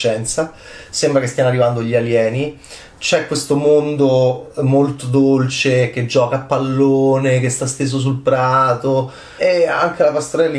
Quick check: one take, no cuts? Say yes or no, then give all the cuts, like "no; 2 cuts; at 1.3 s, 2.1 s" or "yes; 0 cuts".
no; 1 cut; at 9.4 s